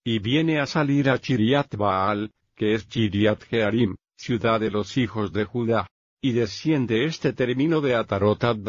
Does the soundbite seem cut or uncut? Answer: cut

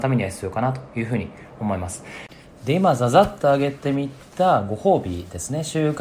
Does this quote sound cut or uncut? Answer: uncut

